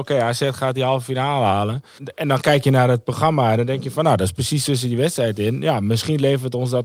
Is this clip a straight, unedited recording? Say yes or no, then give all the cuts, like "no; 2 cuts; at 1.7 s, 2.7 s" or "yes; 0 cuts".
no; 1 cut; at 2.0 s